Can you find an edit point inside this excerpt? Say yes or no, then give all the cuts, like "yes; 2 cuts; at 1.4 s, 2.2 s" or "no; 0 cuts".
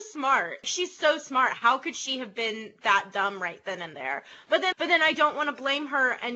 yes; 1 cut; at 4.7 s